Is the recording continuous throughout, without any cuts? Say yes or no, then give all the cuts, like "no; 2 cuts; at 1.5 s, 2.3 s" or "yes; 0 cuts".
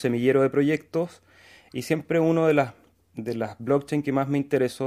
yes; 0 cuts